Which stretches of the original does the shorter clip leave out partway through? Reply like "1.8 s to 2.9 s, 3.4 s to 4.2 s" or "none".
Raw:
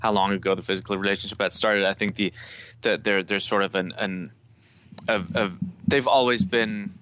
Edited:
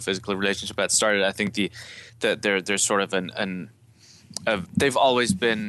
5.3 s to 5.8 s